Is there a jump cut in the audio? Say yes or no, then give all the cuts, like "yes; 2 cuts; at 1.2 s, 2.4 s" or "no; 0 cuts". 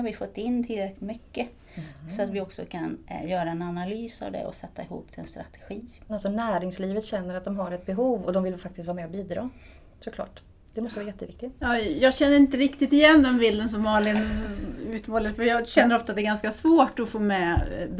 yes; 1 cut; at 6.1 s